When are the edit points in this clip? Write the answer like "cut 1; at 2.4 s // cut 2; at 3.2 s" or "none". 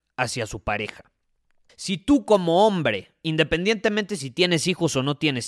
cut 1; at 1.7 s